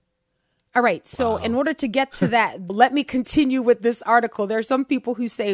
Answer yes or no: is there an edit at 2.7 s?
yes